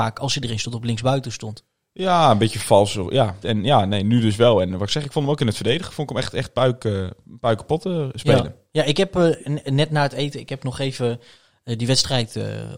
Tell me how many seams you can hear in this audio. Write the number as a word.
one